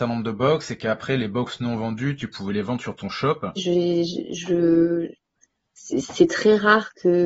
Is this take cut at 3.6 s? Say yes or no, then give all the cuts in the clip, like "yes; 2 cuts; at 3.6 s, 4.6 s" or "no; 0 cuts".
yes; 1 cut; at 3.6 s